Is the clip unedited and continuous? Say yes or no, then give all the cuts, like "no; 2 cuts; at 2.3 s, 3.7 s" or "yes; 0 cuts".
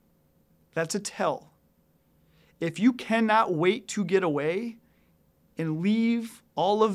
yes; 0 cuts